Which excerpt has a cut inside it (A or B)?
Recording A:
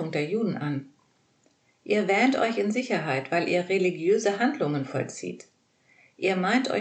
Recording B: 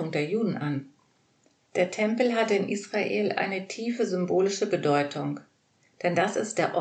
B